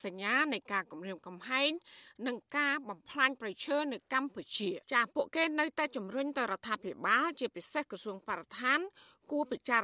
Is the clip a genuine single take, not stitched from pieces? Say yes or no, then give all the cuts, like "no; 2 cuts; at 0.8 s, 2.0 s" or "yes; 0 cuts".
no; 1 cut; at 4.8 s